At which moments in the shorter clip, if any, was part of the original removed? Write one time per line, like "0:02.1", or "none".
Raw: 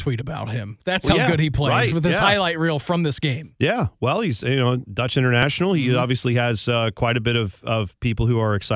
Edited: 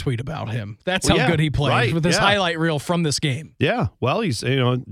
none